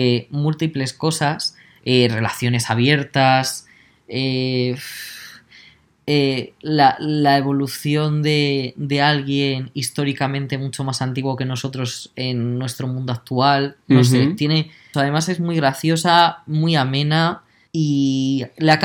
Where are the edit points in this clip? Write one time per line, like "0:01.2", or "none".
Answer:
0:14.9
0:17.7